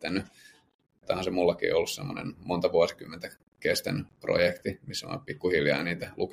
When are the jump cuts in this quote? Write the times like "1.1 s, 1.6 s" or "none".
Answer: 1.0 s